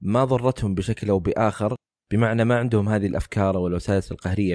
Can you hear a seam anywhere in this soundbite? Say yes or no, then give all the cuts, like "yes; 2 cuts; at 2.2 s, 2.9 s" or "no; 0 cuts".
no; 0 cuts